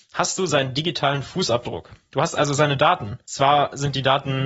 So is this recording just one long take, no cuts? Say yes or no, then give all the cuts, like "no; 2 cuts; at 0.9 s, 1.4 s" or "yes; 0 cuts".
yes; 0 cuts